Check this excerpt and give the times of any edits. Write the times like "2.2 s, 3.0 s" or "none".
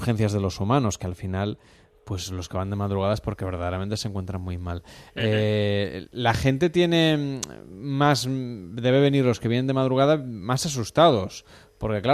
none